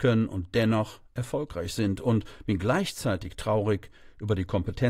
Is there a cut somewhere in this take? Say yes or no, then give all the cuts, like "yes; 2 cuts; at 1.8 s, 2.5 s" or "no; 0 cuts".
no; 0 cuts